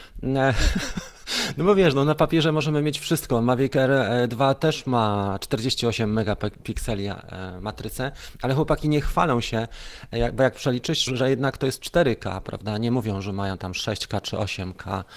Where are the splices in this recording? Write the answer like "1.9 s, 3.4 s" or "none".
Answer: 11.1 s